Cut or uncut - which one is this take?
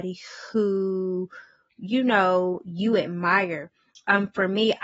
uncut